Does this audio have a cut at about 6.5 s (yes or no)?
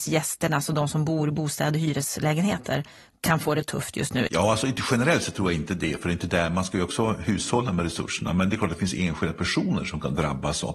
no